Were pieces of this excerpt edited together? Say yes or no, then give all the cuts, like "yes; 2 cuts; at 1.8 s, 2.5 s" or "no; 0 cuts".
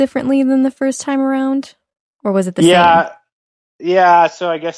no; 0 cuts